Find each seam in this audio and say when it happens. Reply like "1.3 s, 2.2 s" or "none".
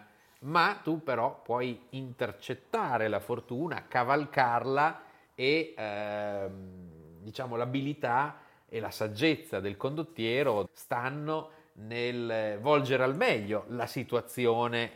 10.6 s